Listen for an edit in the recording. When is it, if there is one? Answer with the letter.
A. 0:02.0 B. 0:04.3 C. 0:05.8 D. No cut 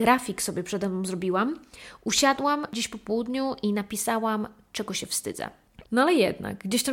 C